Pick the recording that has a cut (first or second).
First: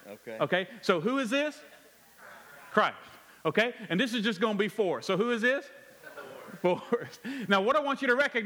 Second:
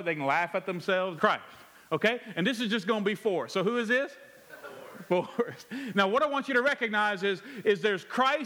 second